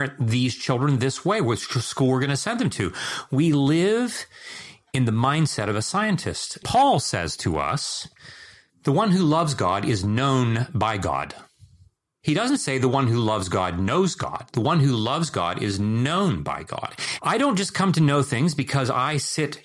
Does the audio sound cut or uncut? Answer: cut